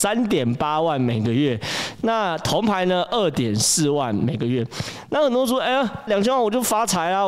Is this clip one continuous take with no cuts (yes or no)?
no